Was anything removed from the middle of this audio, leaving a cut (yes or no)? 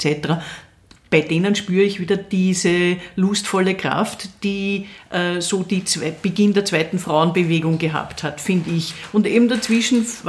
no